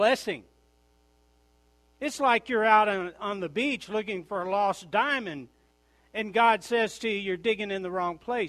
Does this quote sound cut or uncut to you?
uncut